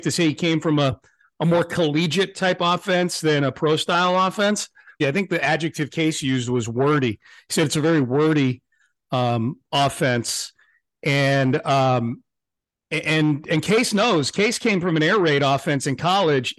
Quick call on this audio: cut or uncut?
cut